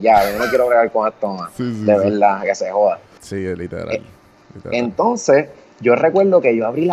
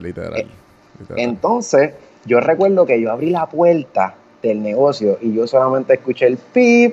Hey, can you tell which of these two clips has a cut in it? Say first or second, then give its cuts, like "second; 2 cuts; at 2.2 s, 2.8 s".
first; 1 cut; at 3.2 s